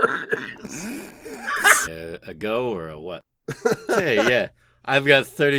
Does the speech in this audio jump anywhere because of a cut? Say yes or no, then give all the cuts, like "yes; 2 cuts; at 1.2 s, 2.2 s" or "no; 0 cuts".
yes; 2 cuts; at 1.9 s, 3.2 s